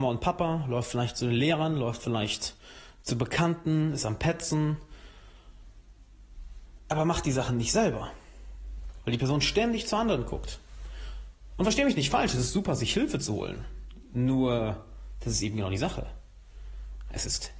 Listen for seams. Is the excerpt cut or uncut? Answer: uncut